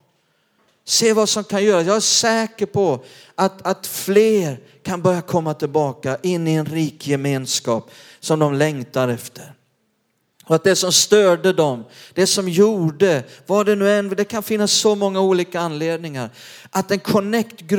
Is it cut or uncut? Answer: uncut